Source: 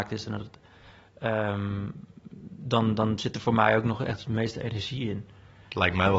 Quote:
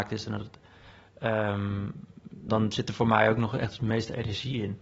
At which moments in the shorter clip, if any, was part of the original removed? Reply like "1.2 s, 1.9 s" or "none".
2.5 s

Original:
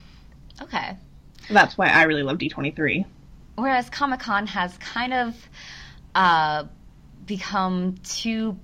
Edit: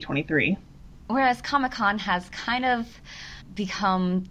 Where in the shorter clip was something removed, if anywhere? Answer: 3.4 s

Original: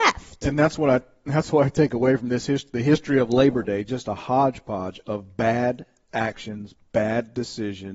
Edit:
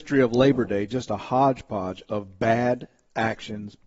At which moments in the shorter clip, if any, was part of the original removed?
none

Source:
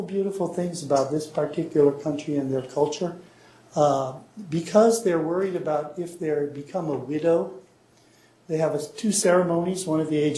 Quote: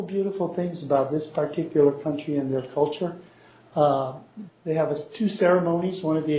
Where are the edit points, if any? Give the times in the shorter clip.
4.5 s

